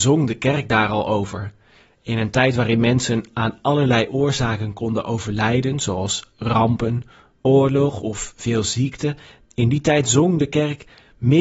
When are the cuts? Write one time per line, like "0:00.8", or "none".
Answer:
0:07.4